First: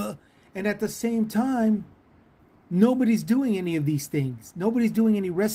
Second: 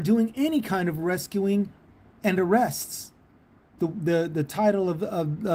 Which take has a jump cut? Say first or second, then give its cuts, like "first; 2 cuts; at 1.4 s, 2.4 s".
second; 2 cuts; at 2.1 s, 3.8 s